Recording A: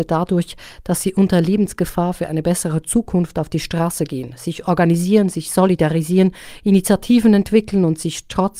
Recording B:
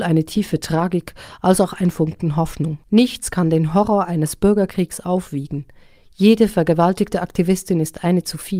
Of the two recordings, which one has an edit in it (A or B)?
B